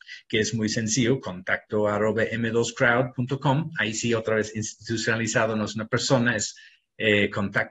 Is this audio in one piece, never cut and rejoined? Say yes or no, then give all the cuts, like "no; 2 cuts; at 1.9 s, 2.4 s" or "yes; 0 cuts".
yes; 0 cuts